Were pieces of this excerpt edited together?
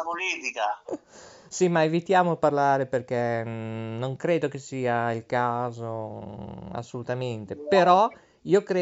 no; 0 cuts

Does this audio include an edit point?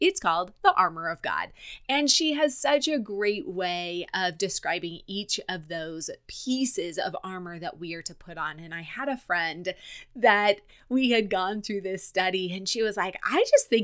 no; 0 cuts

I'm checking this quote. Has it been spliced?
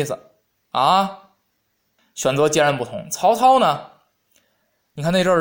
yes; 1 cut; at 2.0 s

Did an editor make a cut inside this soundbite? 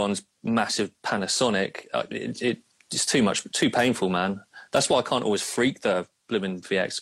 no; 0 cuts

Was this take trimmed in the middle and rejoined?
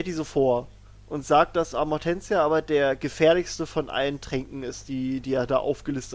no; 0 cuts

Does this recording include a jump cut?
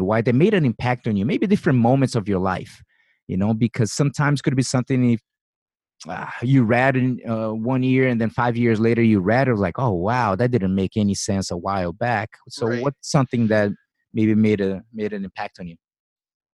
no; 0 cuts

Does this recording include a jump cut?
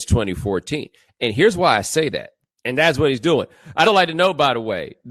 yes; 2 cuts; at 2.5 s, 3.8 s

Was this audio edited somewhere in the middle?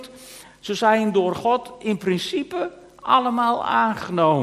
no; 0 cuts

